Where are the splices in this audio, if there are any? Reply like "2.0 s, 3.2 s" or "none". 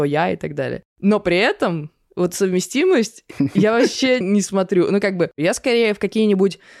4.2 s